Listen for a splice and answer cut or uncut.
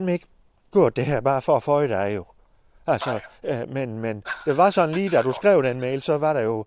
uncut